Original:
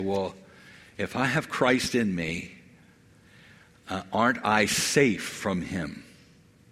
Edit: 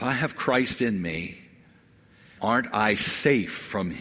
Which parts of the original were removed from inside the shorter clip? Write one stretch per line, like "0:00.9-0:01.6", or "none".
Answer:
0:03.5-0:04.1